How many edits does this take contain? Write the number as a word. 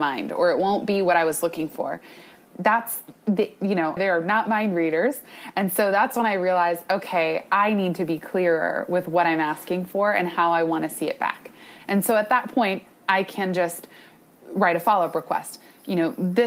one